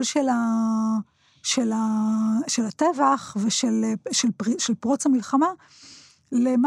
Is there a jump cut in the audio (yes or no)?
no